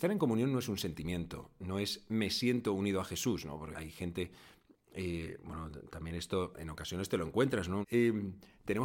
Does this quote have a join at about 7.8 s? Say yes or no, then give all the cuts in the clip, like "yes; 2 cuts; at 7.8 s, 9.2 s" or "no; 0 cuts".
yes; 2 cuts; at 3.7 s, 7.8 s